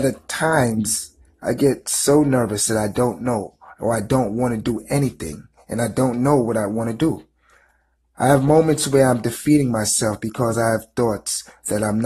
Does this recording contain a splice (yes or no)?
no